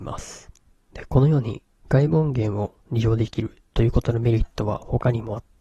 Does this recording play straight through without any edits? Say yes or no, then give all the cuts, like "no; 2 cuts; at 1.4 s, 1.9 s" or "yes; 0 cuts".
yes; 0 cuts